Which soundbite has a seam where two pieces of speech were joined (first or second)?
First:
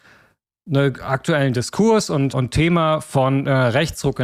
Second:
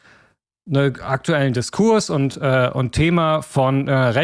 first